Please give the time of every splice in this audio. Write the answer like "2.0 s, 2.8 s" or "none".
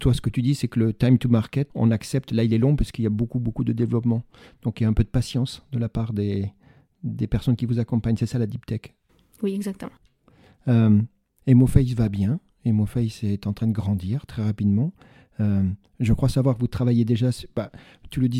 1.7 s